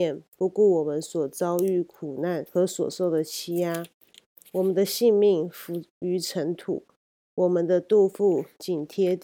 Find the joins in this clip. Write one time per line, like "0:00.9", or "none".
0:02.5